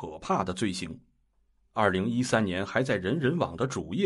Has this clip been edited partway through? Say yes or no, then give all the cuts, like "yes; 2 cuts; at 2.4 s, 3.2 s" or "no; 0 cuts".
yes; 1 cut; at 1.6 s